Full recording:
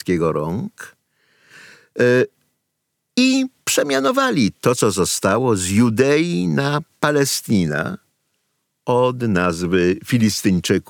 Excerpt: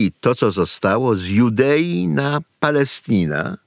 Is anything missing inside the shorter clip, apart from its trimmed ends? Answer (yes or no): no